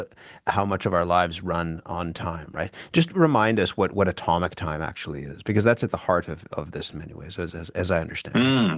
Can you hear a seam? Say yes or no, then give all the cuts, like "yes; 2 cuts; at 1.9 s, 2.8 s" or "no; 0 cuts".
no; 0 cuts